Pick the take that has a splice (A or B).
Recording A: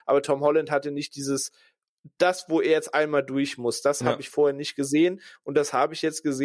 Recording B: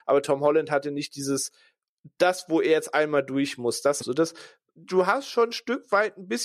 B